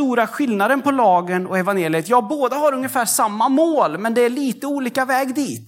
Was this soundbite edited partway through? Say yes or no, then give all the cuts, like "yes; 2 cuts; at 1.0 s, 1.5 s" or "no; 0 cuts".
no; 0 cuts